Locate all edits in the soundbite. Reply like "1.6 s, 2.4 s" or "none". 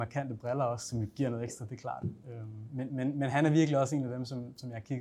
none